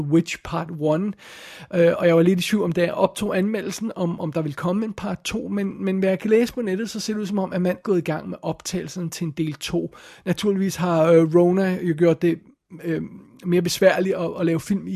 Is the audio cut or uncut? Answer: cut